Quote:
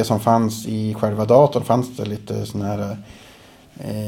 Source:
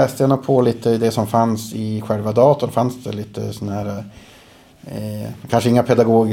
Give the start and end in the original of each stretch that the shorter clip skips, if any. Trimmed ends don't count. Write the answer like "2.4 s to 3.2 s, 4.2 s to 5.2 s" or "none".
none